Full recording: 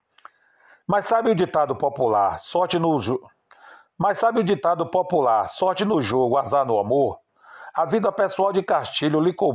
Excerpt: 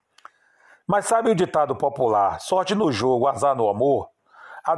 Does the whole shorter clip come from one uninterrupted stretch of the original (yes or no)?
no